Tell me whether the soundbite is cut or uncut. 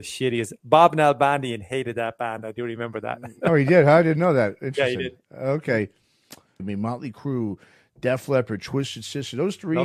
cut